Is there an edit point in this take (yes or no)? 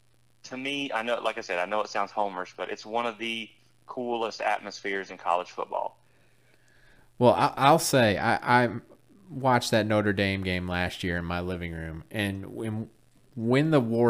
no